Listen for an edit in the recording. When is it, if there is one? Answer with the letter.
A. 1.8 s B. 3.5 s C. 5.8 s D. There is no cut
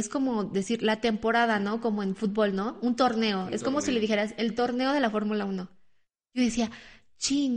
D